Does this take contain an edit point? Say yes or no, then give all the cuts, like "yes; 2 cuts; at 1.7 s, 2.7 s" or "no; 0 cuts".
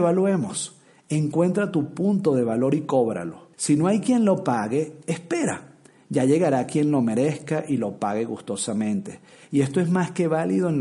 yes; 1 cut; at 3.5 s